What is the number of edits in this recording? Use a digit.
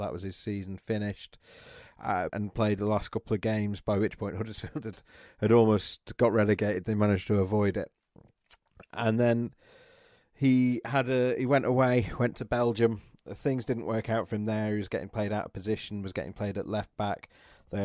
1